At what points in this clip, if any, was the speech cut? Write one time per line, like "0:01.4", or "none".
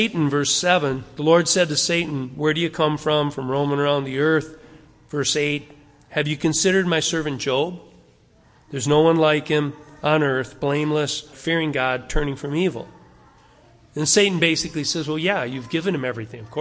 0:11.3